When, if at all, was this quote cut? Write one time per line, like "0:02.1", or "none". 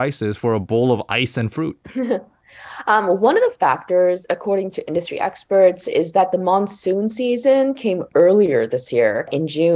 none